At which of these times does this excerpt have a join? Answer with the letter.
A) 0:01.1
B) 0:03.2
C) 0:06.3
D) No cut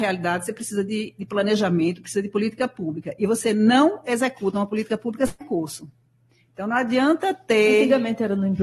D